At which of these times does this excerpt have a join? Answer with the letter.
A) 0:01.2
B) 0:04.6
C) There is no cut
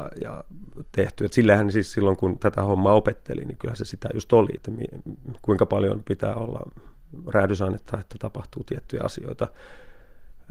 B